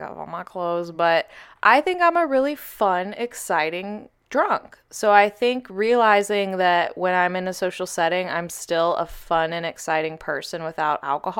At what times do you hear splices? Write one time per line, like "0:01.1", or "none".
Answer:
none